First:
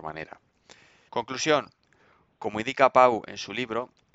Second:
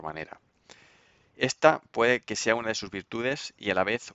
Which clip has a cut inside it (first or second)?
first